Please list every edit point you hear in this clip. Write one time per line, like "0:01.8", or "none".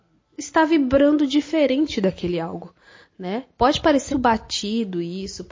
0:04.1